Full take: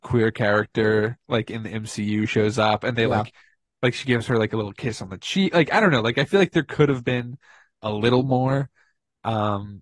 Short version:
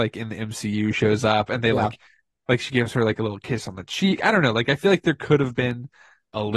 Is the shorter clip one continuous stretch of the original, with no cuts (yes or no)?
no